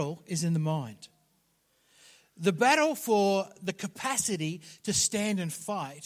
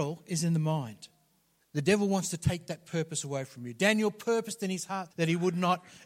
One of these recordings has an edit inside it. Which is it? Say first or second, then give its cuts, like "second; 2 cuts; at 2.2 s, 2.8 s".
second; 2 cuts; at 1.6 s, 5.1 s